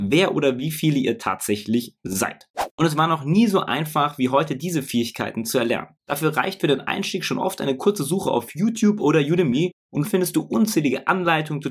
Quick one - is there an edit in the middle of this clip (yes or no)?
yes